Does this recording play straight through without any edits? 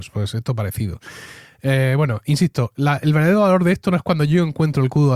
yes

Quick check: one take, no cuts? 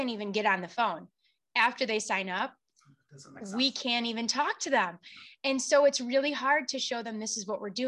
yes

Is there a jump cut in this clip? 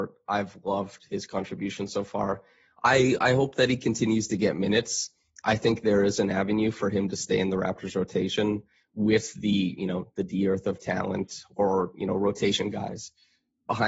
no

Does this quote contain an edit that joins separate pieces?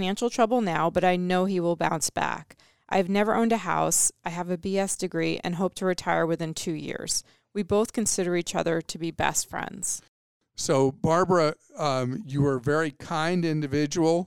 no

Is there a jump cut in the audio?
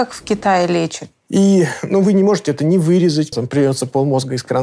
yes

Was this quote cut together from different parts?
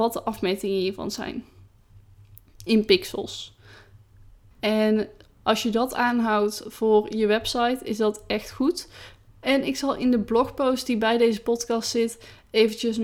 yes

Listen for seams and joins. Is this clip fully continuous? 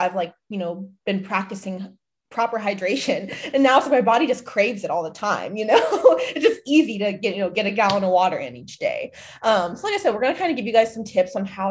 yes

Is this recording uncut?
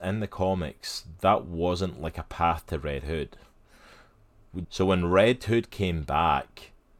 no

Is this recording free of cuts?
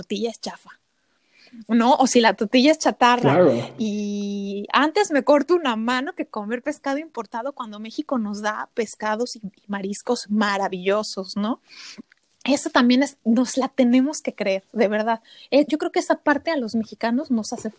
yes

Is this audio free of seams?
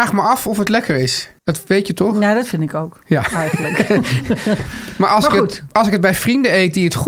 no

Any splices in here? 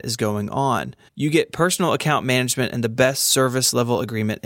yes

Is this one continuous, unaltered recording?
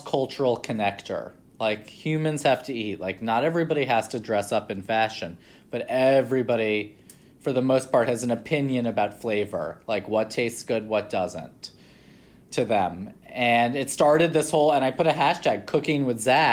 yes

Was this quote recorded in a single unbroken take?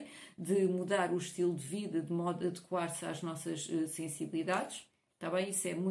yes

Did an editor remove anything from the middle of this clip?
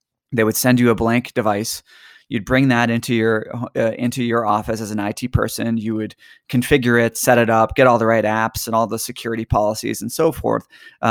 no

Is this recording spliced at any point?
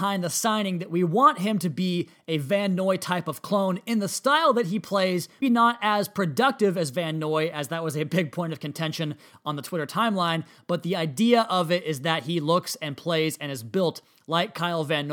yes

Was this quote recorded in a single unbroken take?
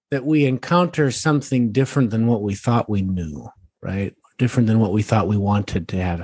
yes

